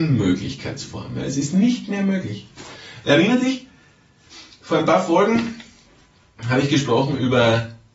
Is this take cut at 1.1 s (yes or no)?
no